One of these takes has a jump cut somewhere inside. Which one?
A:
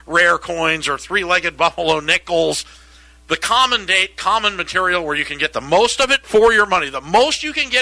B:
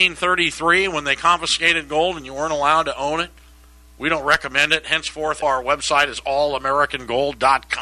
B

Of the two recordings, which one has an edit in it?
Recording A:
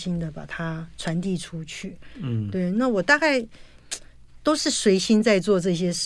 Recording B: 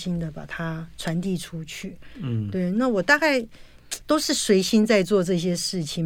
B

